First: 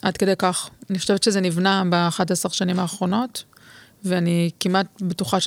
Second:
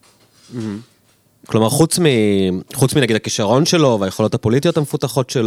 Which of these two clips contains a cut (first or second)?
second